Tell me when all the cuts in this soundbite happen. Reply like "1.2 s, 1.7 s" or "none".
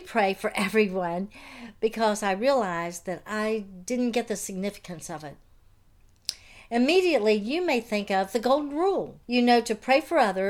9.2 s